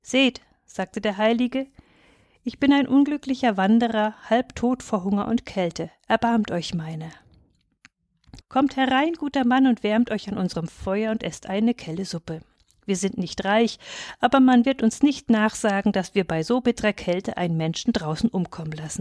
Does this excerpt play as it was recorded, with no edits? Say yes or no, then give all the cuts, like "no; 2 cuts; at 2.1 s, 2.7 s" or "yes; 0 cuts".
no; 1 cut; at 8.4 s